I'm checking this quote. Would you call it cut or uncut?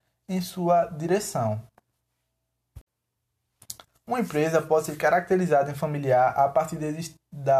cut